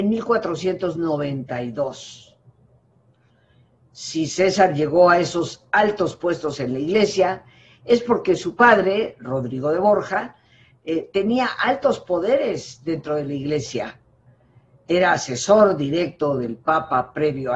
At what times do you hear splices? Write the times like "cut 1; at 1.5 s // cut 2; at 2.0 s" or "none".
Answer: none